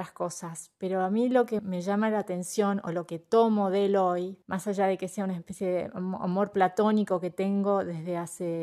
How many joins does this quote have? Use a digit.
2